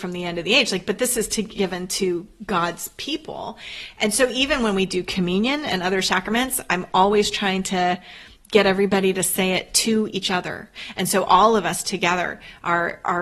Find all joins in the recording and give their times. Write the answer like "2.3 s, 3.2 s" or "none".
10.9 s